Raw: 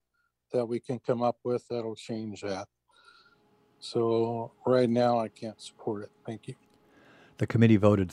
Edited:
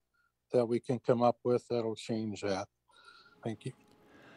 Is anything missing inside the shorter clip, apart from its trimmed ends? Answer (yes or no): yes